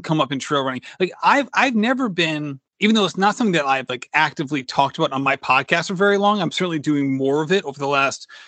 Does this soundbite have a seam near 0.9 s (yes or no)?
no